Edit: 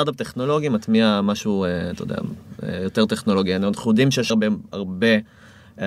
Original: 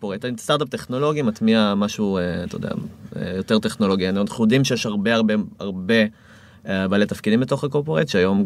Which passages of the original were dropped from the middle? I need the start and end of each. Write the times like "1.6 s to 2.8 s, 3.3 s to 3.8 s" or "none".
4.8 s to 5.2 s

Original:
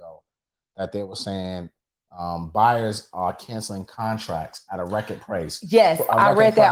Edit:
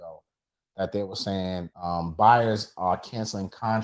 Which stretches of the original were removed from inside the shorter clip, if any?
1.7 s to 2.1 s

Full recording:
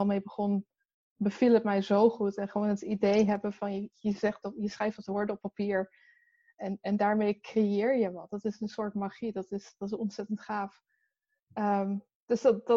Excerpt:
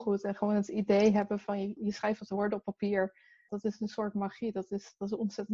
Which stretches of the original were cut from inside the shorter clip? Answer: 3.9 s to 4.5 s, 6.3 s to 8.3 s

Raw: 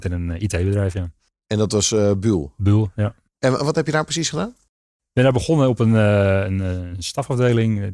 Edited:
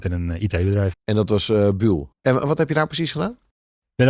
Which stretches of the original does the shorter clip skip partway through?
0.9 s to 1.4 s, 2.5 s to 3.3 s

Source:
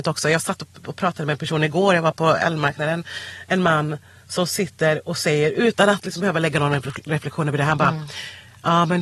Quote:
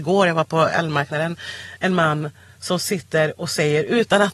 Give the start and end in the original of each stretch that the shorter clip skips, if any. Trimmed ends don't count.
none

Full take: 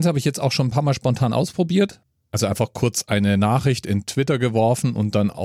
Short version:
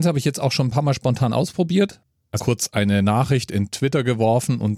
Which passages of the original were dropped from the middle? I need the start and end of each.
2.4 s to 2.7 s

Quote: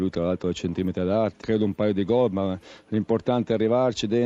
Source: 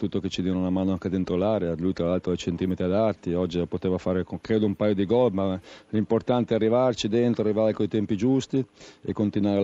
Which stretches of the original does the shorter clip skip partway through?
3.2 s to 4.4 s

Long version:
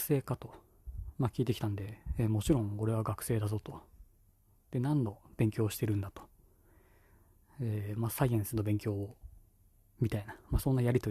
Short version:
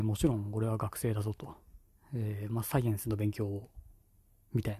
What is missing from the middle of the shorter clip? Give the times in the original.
4.2 s to 7.4 s

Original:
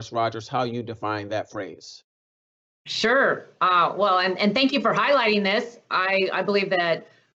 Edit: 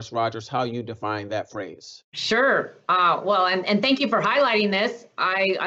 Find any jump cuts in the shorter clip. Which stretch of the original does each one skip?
2.0 s to 2.8 s

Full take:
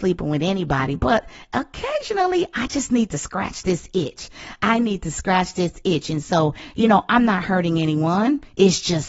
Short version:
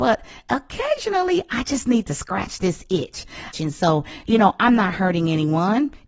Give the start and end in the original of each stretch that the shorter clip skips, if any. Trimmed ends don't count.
4.6 s to 6.0 s

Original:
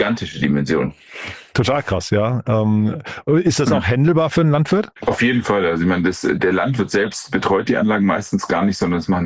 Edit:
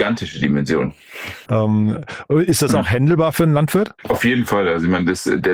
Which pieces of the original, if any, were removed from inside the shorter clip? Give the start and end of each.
1.5 s to 2.4 s

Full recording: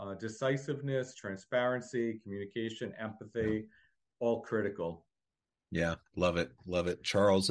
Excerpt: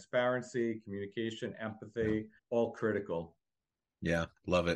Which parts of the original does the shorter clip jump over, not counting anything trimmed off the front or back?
3.8 s to 4.1 s

